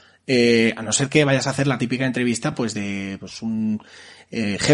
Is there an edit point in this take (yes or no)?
no